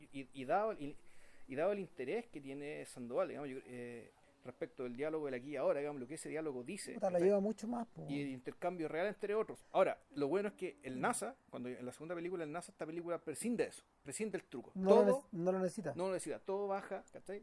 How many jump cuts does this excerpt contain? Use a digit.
1